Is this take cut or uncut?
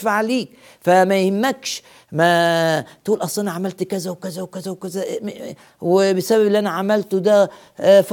cut